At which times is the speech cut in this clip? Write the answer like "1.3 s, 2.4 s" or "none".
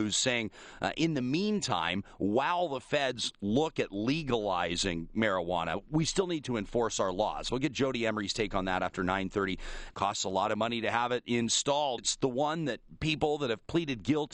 9.9 s, 12.0 s